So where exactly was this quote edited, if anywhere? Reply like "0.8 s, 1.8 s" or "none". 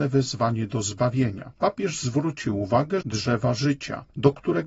1.6 s, 3.0 s